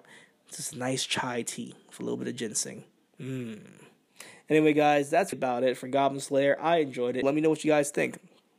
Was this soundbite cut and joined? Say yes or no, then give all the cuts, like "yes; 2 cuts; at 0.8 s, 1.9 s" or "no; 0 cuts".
yes; 2 cuts; at 5.3 s, 7.2 s